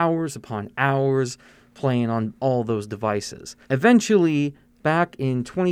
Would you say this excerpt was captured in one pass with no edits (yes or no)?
no